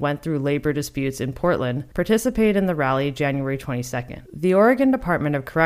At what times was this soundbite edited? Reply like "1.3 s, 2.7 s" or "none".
4.3 s